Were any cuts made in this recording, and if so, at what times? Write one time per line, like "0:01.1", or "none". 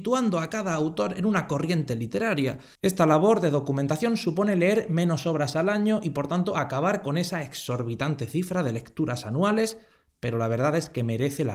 0:02.7